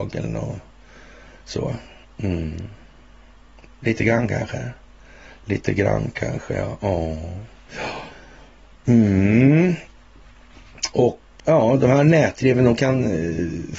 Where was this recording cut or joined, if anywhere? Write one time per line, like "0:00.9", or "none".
0:11.4